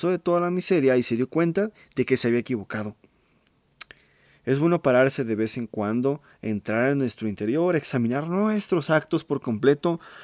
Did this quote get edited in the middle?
no; 0 cuts

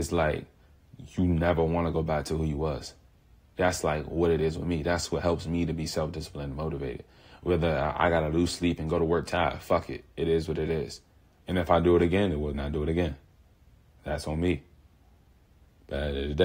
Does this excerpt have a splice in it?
yes; 2 cuts; at 11.4 s, 12.5 s

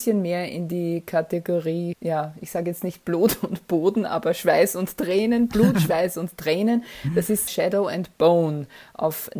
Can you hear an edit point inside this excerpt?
no; 0 cuts

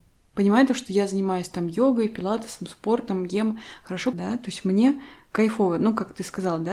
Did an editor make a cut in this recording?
yes; 1 cut; at 4.1 s

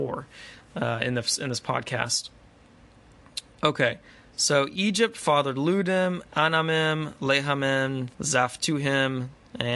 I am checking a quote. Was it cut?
yes; 1 cut; at 8.1 s

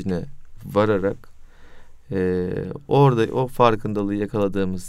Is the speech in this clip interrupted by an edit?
no; 0 cuts

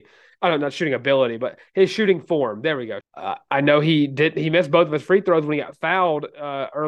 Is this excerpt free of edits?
no; 1 cut; at 3.0 s

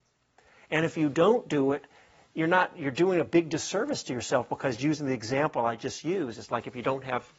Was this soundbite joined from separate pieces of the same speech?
no; 0 cuts

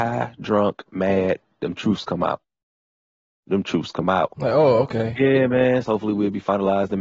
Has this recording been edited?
yes; 2 cuts; at 4.4 s, 5.8 s

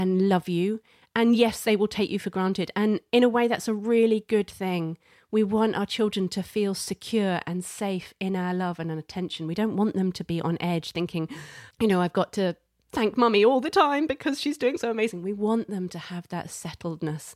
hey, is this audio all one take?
no; 1 cut; at 11.7 s

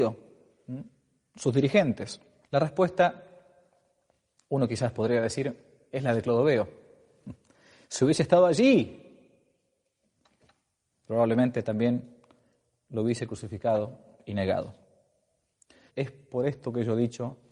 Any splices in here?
yes; 2 cuts; at 2.4 s, 15.9 s

